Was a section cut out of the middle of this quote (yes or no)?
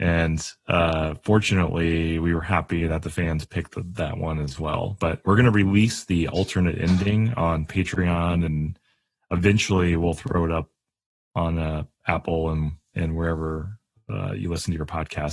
no